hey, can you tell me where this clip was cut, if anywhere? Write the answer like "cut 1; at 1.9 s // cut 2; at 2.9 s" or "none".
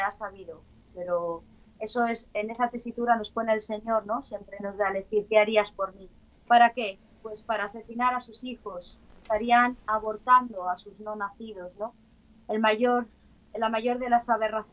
cut 1; at 6.3 s